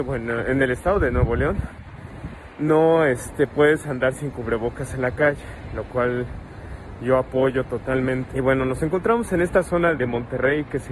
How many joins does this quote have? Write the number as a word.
two